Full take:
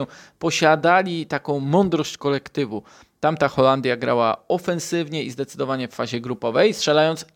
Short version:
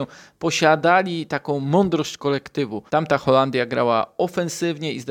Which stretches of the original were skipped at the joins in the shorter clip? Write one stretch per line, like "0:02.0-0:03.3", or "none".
0:02.9-0:03.2